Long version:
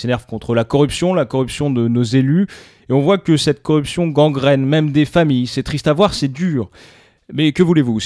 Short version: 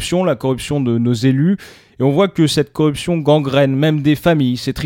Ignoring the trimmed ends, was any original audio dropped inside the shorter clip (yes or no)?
no